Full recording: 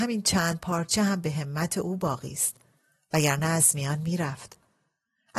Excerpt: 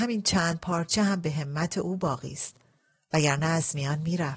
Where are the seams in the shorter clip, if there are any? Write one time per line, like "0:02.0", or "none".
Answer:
none